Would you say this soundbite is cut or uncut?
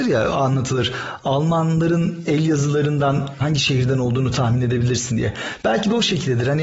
uncut